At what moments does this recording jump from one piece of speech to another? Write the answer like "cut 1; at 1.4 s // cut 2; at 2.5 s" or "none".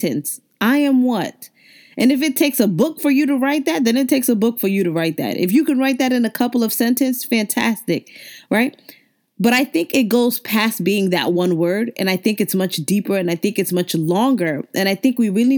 none